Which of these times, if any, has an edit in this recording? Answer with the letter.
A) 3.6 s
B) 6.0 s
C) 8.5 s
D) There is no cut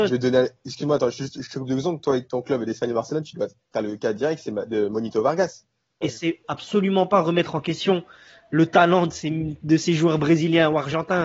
B